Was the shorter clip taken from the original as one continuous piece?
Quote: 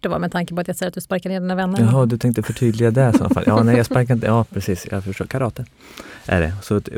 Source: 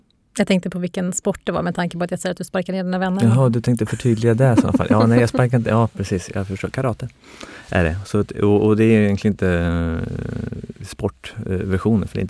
yes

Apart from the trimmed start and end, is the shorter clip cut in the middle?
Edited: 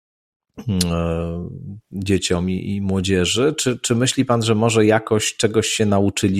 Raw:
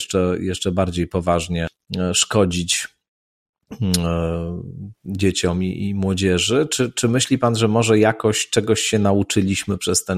no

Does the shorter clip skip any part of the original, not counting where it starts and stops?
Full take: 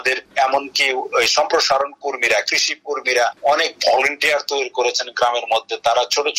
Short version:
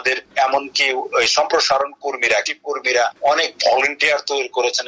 yes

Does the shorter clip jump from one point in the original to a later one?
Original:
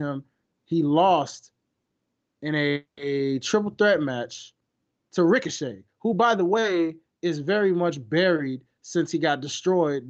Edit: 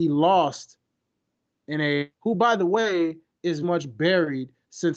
yes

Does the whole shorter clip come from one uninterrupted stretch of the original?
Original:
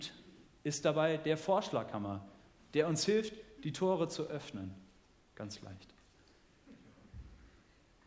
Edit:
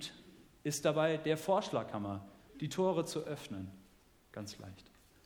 no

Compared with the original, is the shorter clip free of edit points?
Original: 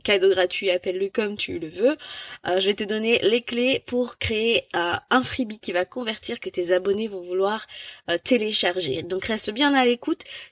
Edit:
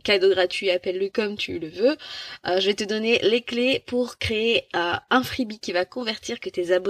yes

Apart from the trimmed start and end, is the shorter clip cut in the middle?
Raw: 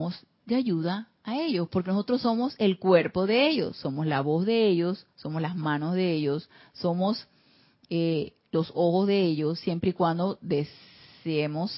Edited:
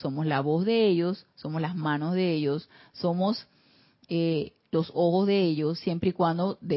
no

